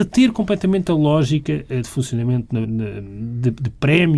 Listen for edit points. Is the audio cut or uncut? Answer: cut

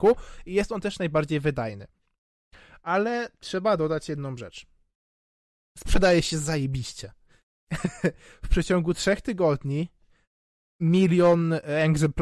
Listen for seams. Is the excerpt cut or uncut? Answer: uncut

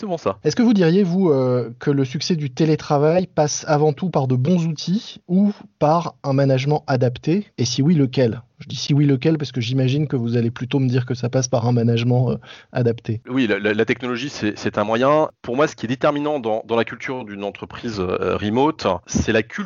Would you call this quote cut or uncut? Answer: uncut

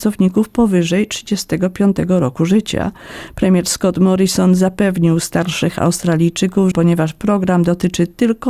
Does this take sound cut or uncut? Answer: cut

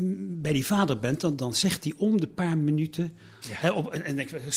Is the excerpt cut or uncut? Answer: cut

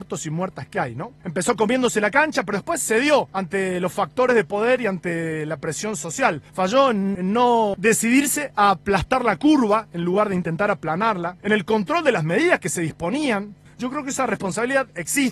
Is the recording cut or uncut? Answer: cut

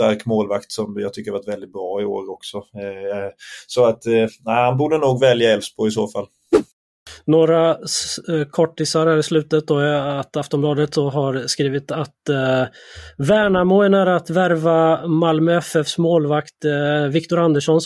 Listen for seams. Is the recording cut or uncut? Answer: uncut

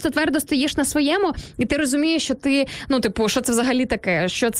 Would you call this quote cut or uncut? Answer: uncut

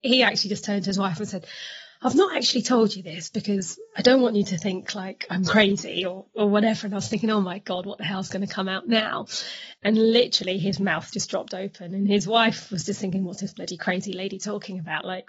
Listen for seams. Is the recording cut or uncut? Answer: cut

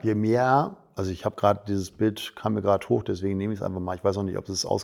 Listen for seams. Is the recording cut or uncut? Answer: uncut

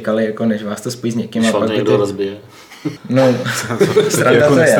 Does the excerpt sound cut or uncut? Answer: cut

